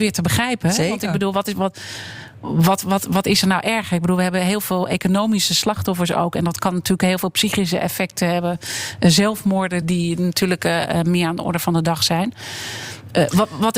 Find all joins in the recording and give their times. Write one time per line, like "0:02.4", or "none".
0:09.8